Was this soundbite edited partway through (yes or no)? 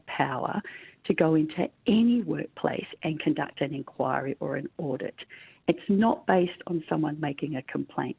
no